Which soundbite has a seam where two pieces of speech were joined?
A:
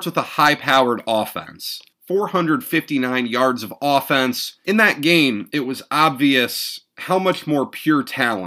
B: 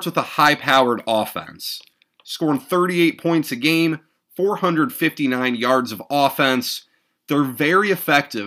A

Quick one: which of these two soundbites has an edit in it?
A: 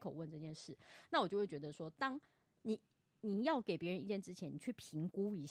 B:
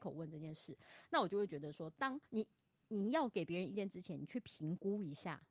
B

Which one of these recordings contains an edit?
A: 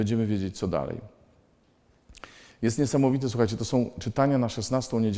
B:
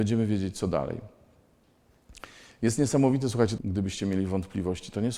B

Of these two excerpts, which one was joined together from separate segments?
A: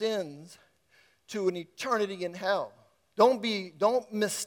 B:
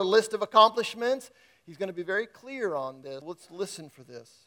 B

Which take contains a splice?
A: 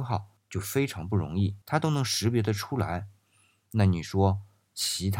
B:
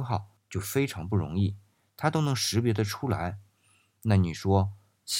A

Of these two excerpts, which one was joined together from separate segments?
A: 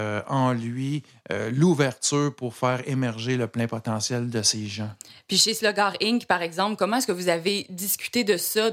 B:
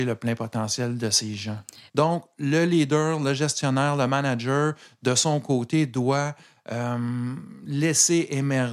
B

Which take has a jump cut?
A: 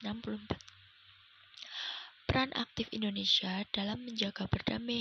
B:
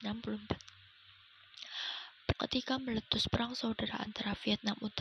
B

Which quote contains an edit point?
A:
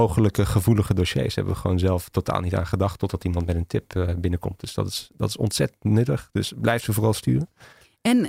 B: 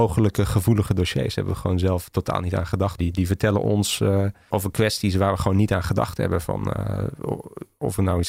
B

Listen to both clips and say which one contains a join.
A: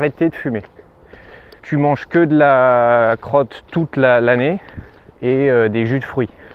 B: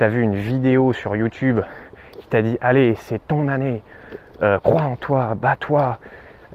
A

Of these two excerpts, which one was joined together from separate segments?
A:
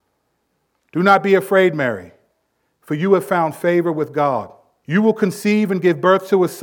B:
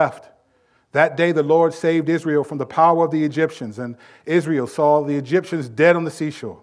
A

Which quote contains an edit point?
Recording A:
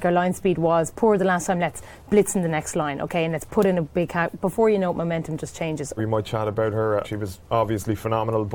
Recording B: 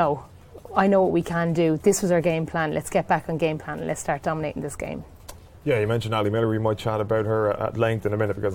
A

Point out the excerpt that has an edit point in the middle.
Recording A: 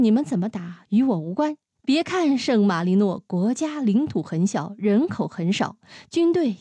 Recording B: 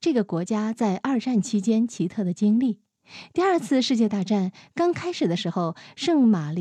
A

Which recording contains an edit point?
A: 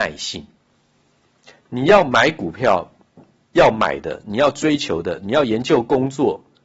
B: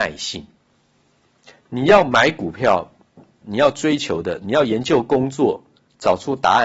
B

